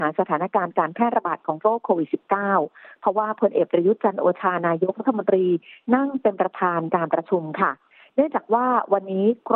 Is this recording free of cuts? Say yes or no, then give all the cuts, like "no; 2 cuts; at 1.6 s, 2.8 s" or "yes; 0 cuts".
yes; 0 cuts